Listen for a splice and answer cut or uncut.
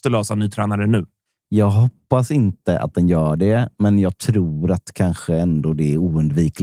uncut